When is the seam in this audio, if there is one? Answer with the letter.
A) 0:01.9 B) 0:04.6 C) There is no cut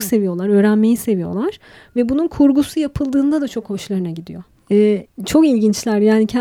B